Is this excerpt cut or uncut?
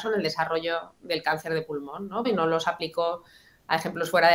cut